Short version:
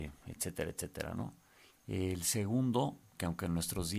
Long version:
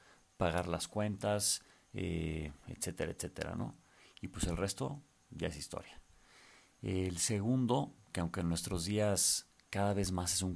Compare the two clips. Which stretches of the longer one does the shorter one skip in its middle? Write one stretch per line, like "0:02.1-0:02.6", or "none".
0:04.1-0:06.7